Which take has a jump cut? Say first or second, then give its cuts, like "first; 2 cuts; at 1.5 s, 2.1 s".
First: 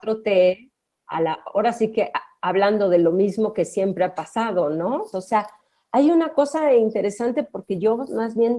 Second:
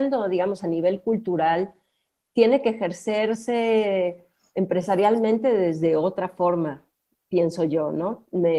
first; 1 cut; at 5.1 s